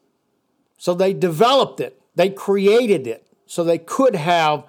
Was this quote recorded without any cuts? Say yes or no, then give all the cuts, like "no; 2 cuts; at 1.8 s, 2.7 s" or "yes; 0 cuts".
yes; 0 cuts